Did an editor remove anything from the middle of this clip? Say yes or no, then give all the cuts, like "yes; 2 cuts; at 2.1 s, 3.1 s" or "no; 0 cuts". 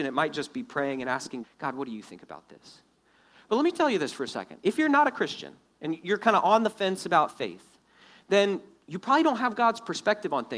yes; 1 cut; at 1.4 s